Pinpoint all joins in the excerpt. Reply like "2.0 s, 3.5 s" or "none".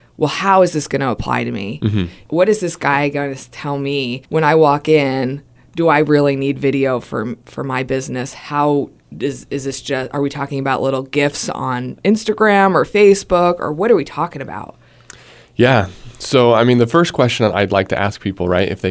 4.2 s